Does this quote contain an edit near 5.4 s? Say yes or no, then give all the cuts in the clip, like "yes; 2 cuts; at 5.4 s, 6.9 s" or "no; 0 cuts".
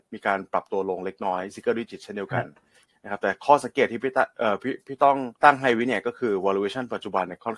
yes; 1 cut; at 5.4 s